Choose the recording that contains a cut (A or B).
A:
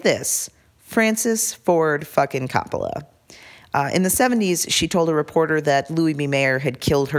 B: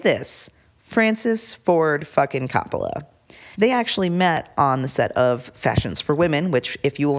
B